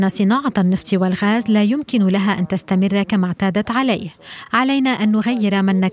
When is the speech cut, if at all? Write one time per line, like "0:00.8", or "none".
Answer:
none